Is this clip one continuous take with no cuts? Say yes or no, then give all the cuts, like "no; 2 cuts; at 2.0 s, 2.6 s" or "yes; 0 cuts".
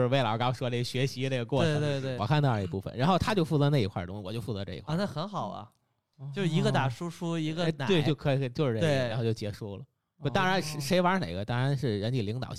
no; 1 cut; at 2.2 s